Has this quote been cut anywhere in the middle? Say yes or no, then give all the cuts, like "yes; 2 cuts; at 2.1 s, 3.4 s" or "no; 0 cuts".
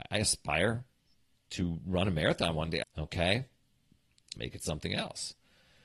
yes; 2 cuts; at 2.8 s, 4.4 s